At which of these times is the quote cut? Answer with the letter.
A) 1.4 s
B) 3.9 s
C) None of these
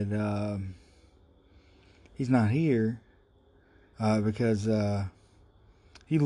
B